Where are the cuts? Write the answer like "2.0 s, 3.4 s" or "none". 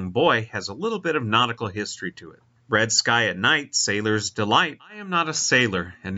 2.6 s, 4.8 s